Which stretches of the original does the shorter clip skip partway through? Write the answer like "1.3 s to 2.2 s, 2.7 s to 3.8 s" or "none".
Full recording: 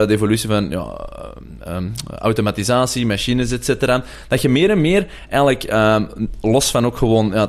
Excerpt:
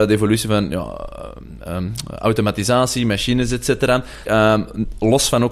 4.2 s to 5.7 s